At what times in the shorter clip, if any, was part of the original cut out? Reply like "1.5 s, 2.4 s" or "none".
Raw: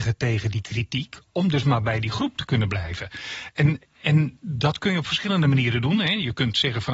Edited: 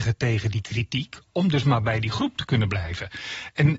none